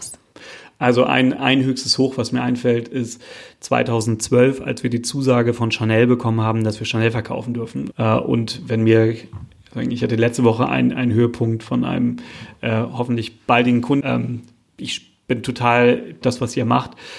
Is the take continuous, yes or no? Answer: no